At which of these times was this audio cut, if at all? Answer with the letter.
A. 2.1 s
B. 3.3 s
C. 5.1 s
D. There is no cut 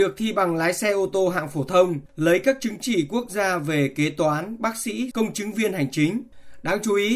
C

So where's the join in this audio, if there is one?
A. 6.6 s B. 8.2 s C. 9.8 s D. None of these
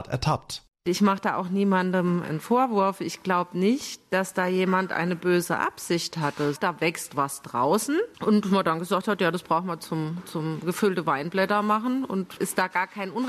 A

